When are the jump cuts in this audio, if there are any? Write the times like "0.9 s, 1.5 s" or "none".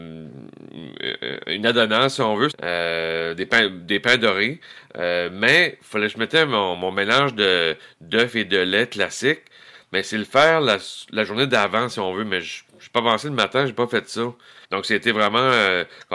2.5 s, 14.6 s